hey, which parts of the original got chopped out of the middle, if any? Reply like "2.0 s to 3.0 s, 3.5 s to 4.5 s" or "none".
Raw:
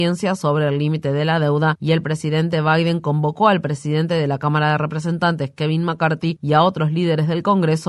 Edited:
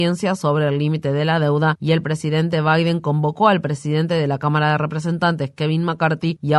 none